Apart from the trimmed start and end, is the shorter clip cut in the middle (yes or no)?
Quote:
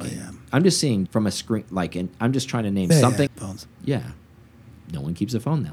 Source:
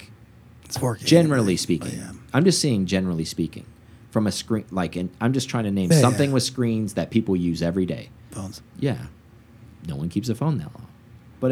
yes